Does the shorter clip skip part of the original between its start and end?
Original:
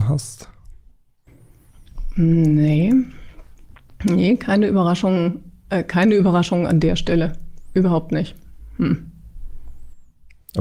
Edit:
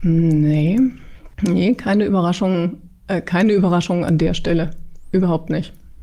yes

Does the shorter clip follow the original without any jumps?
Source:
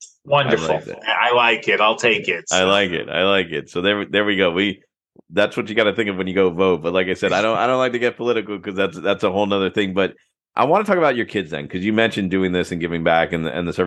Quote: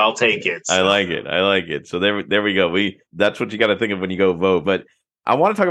no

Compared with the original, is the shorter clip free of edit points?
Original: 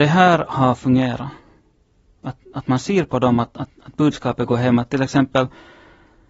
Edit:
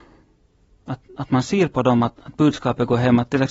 no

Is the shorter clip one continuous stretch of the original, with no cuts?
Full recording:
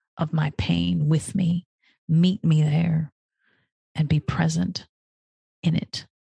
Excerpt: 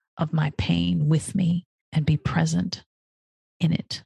no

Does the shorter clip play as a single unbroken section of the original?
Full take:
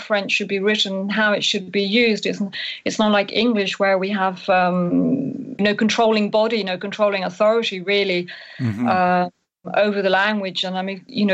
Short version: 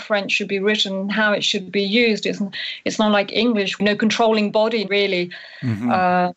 no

